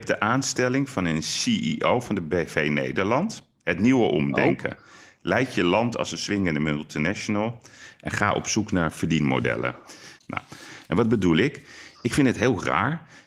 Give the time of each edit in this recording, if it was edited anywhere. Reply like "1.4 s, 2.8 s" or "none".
10.2 s